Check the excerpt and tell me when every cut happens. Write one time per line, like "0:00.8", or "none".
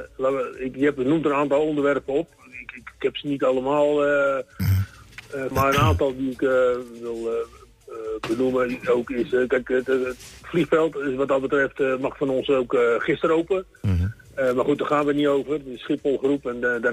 0:05.5